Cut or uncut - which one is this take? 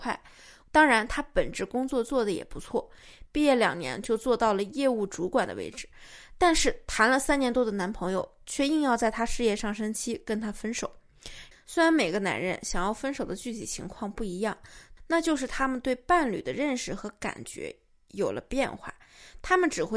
cut